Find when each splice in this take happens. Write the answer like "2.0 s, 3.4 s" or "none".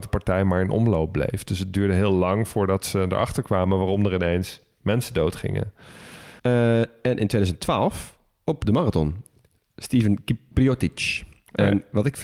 6.4 s